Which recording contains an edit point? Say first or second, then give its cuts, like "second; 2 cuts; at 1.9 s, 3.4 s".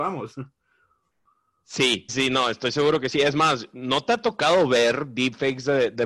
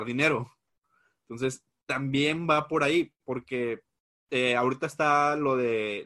first; 1 cut; at 2.1 s